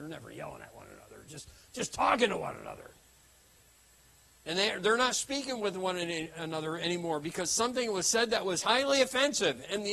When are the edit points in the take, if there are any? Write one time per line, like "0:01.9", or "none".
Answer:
0:06.3